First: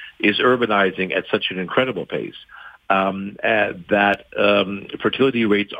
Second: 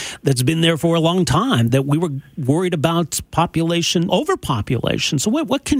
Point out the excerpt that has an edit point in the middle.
second; 2 cuts; at 1.7 s, 4.1 s

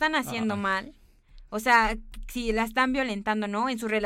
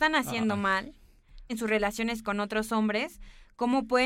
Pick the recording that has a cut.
second; 1 cut; at 1.5 s

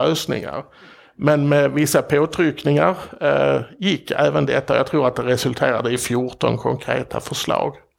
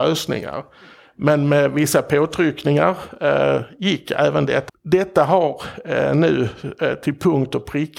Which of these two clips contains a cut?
second; 1 cut; at 4.7 s

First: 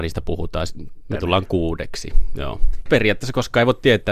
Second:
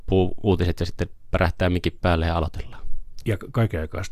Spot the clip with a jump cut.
first; 2 cuts; at 1.1 s, 2.9 s

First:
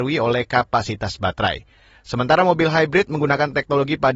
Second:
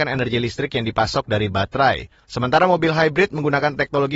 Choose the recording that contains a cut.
second; 1 cut; at 2.2 s

